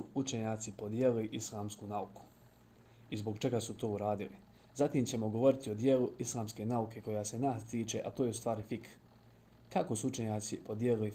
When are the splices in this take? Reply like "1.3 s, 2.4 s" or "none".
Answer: none